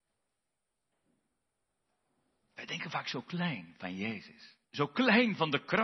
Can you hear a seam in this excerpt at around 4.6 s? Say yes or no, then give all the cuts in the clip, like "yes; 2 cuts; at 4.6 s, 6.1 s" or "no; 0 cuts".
yes; 1 cut; at 4.6 s